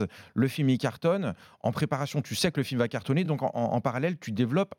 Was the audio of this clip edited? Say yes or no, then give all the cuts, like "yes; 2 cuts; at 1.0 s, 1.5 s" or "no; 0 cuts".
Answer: no; 0 cuts